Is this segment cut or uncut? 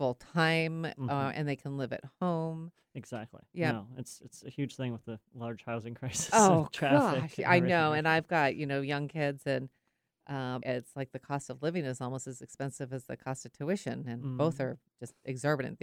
cut